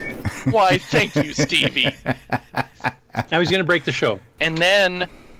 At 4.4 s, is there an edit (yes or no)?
yes